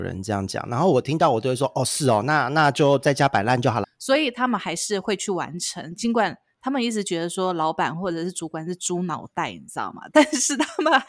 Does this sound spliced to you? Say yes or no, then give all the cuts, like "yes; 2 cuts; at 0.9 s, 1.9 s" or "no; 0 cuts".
yes; 1 cut; at 3.8 s